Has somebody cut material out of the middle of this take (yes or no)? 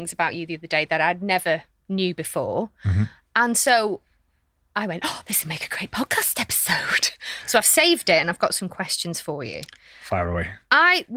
no